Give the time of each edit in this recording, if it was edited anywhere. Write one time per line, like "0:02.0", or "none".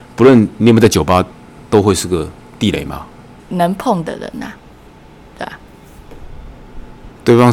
0:03.4